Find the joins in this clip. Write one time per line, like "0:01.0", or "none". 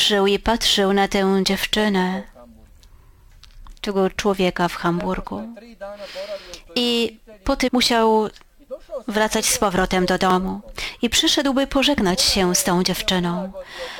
0:07.7